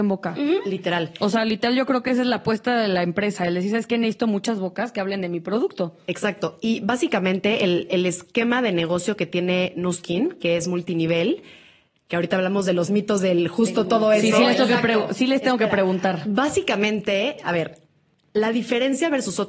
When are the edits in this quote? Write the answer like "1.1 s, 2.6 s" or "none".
none